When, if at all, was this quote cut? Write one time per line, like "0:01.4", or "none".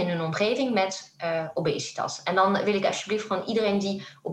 none